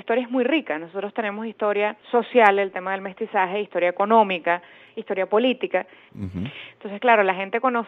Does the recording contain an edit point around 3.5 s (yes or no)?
no